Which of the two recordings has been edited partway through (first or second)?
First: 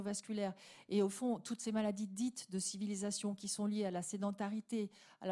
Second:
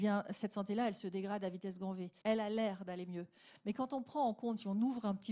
second